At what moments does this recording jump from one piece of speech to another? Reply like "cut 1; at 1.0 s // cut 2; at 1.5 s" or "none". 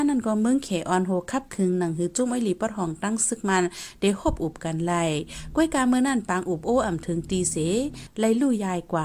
none